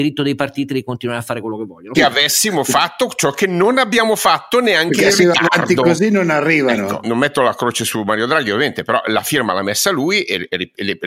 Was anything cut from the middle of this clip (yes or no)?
yes